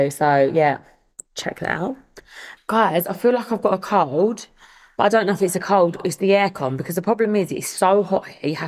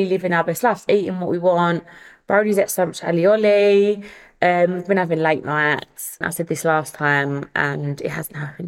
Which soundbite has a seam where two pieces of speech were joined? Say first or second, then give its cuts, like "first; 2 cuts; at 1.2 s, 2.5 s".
second; 1 cut; at 6.2 s